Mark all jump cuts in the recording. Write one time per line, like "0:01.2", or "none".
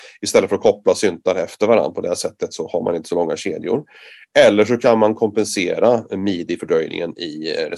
none